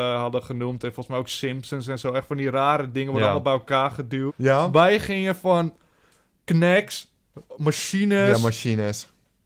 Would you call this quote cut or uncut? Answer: cut